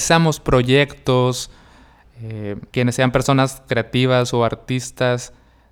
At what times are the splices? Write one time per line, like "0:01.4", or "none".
0:02.7

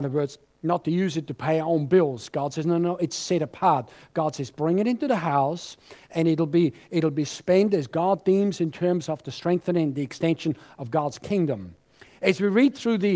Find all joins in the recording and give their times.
none

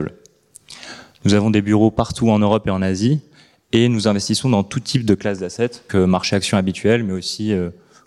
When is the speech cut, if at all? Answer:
0:05.9

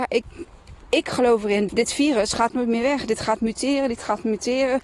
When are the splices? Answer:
0:01.7

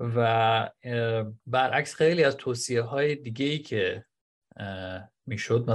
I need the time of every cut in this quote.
0:01.4

